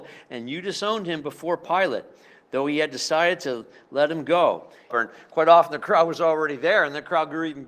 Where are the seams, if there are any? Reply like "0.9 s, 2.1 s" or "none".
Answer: 4.9 s